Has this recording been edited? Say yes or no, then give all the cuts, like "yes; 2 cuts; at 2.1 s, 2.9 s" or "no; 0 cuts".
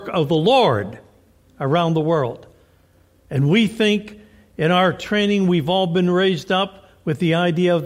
no; 0 cuts